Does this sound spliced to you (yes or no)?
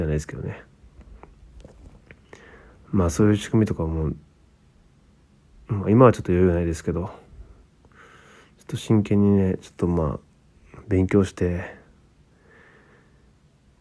no